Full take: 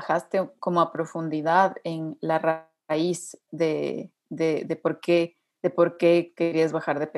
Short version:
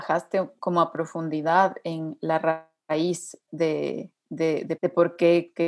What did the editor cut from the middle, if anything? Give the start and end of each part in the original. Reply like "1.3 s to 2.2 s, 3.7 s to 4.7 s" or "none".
4.8 s to 5.6 s